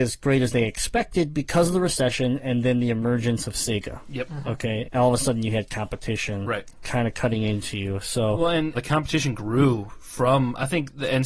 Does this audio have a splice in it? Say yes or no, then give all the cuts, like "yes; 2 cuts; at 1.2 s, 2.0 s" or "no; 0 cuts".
yes; 2 cuts; at 4.8 s, 8.7 s